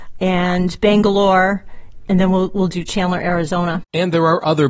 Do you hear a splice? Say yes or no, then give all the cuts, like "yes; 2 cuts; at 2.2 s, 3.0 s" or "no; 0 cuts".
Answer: no; 0 cuts